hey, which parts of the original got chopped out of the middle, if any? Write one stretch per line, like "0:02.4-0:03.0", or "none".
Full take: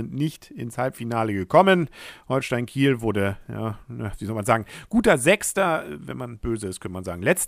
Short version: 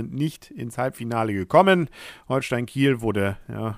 none